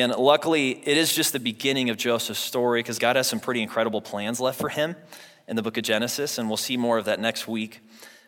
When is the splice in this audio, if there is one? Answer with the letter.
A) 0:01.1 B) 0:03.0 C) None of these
B